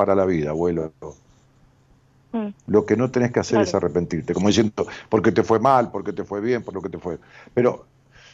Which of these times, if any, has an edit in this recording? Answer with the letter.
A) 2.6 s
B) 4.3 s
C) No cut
A